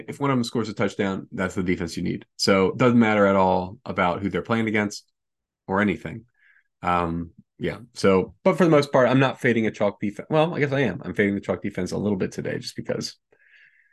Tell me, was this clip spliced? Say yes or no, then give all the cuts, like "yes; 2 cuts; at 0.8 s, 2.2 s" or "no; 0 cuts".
no; 0 cuts